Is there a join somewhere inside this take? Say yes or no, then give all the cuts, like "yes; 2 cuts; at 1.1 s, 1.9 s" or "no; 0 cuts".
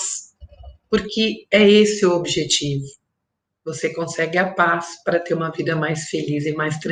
no; 0 cuts